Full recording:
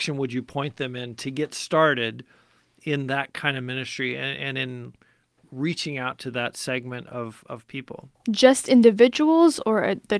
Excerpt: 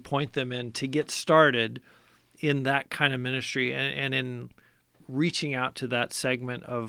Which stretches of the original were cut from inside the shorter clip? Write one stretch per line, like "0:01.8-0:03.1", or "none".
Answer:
none